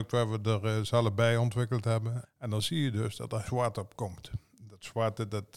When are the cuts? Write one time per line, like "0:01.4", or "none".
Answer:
0:02.2
0:03.5

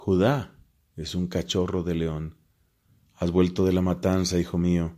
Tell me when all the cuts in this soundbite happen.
none

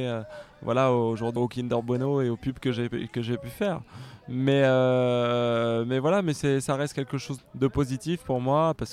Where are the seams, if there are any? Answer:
0:01.4
0:07.4

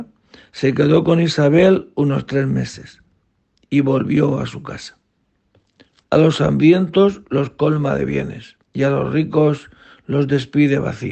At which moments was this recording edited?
0:06.0
0:08.6

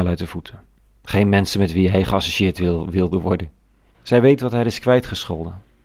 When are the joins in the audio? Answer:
0:03.9

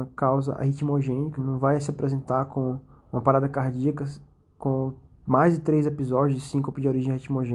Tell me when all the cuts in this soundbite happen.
0:01.4

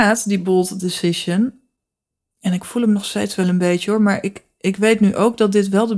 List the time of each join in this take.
none

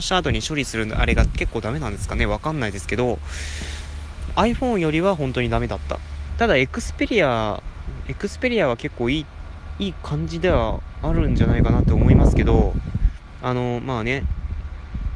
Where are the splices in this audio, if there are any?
0:06.3

